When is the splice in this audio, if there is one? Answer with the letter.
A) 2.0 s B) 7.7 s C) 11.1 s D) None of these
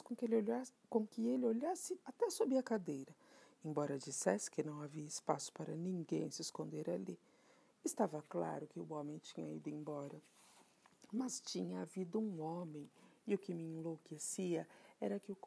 A